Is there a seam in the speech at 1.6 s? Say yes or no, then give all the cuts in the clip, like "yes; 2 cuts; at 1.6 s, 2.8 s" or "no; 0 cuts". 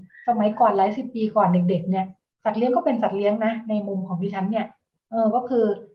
no; 0 cuts